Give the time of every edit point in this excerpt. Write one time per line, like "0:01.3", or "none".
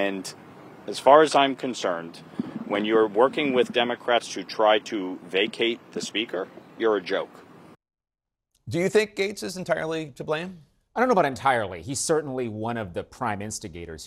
0:06.7